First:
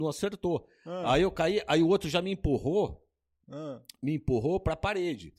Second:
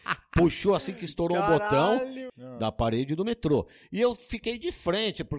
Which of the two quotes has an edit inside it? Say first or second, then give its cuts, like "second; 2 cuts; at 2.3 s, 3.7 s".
second; 1 cut; at 2.3 s